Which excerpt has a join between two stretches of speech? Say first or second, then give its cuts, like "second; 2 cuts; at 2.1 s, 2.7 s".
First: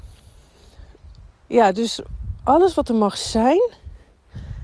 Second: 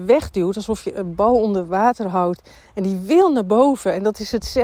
first; 1 cut; at 1.3 s